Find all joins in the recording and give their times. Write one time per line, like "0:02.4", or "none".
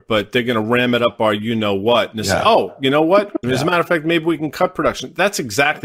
0:03.4